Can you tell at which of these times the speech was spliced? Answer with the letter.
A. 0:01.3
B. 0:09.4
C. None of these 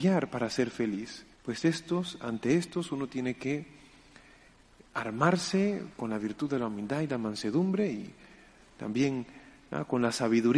A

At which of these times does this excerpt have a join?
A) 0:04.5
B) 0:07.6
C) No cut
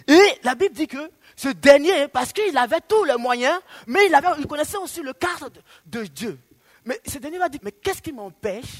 B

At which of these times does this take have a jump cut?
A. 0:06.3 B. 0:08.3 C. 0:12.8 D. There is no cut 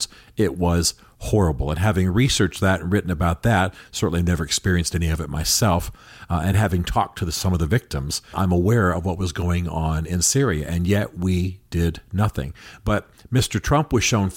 B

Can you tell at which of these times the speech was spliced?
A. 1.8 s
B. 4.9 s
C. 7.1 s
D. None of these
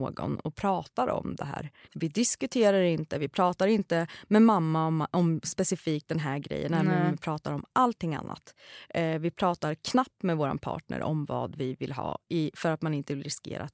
A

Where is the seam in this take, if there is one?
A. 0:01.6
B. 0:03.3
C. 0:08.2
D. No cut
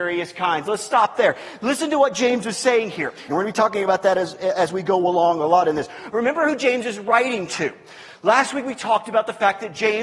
B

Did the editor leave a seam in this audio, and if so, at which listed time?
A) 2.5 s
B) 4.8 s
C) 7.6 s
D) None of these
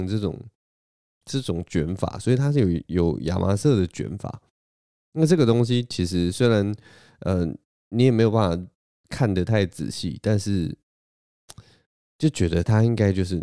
D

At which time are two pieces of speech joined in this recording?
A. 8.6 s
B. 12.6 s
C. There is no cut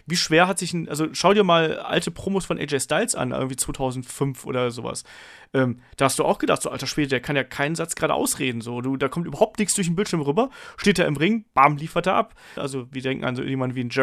B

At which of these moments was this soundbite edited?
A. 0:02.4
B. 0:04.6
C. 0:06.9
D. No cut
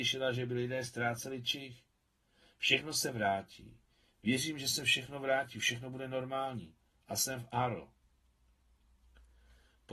D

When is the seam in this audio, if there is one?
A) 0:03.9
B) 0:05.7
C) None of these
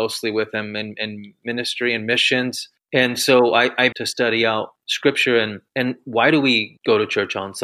A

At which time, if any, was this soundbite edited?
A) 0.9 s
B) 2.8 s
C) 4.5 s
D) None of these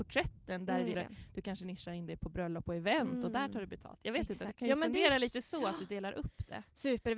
A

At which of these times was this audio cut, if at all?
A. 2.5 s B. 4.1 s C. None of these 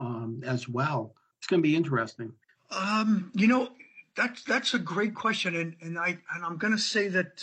A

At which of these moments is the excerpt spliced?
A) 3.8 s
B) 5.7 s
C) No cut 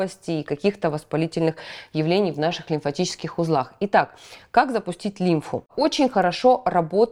C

